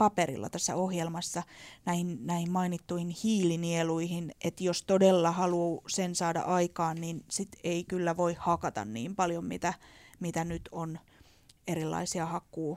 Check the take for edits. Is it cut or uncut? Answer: cut